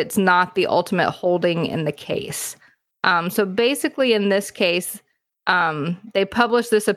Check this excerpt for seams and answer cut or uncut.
uncut